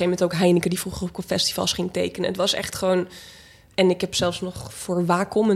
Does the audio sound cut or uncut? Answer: uncut